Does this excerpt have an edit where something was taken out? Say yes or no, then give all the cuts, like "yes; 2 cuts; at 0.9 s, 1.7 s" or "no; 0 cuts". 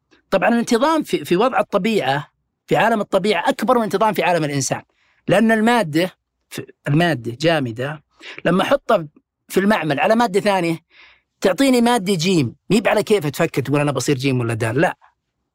yes; 1 cut; at 1.0 s